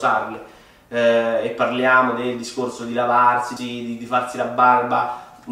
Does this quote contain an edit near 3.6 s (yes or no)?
yes